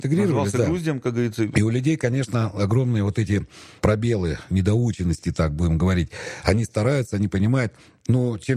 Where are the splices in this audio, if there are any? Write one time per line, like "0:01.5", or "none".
none

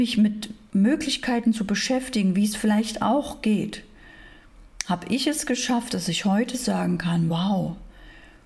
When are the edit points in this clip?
none

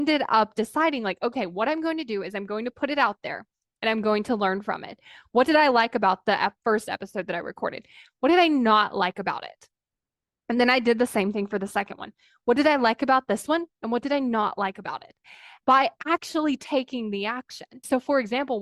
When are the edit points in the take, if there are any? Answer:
0:15.6

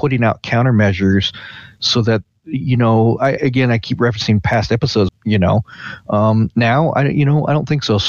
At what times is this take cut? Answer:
0:03.4
0:05.1

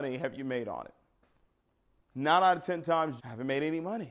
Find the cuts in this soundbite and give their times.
0:03.2

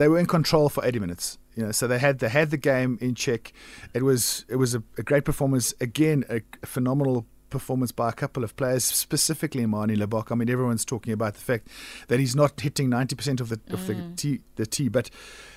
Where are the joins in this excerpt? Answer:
none

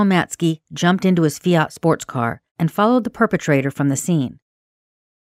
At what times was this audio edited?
0:02.5

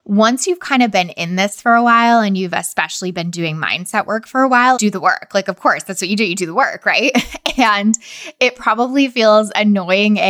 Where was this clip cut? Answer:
0:04.8

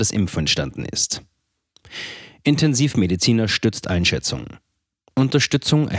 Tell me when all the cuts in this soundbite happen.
none

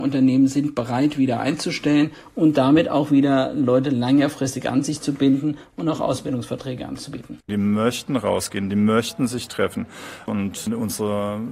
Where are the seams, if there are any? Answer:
0:07.5
0:10.3

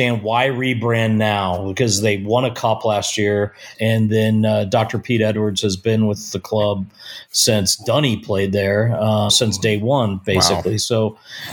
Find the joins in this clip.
0:03.7
0:09.3

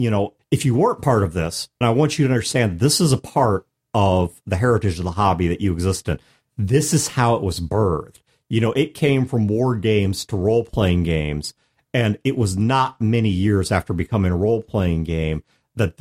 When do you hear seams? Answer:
0:01.8

